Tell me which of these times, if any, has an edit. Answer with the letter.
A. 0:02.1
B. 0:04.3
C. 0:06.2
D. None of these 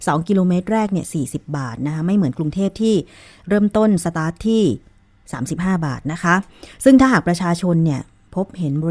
D